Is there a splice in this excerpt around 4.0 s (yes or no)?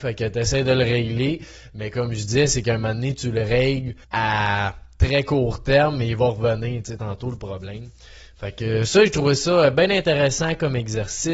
yes